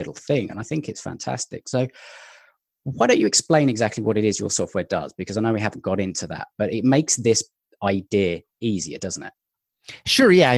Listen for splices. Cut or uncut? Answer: uncut